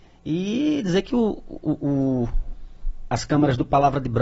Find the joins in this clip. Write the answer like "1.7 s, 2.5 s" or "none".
none